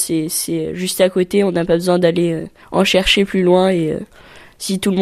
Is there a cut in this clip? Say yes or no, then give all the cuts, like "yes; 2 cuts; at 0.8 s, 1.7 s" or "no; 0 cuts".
no; 0 cuts